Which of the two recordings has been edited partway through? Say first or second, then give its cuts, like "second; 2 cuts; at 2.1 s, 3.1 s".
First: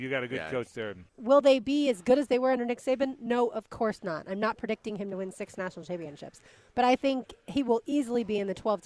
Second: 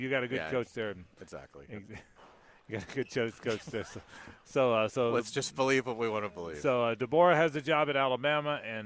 first; 1 cut; at 1.1 s